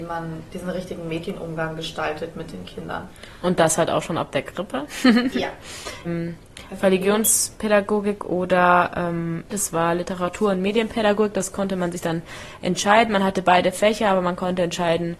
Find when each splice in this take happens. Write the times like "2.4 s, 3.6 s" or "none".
6.0 s, 9.5 s